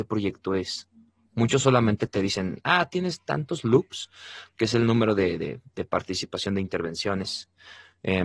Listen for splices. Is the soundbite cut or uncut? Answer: uncut